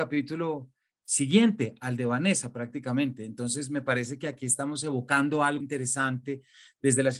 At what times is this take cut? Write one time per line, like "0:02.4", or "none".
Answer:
0:05.6